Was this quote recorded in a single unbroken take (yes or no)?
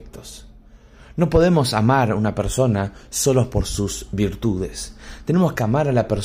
yes